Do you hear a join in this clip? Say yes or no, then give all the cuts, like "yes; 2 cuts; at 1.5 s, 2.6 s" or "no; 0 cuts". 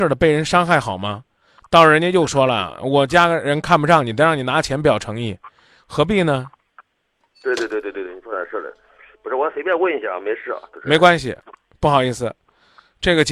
no; 0 cuts